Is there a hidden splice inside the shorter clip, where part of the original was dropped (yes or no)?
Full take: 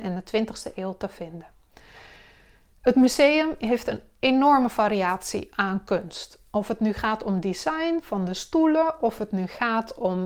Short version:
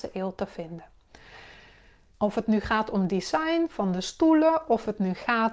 yes